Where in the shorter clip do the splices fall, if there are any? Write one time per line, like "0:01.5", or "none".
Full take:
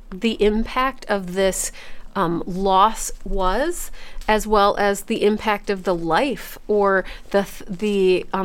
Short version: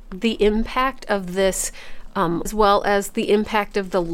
0:02.4